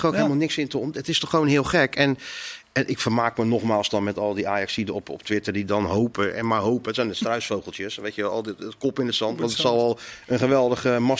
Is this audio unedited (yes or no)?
yes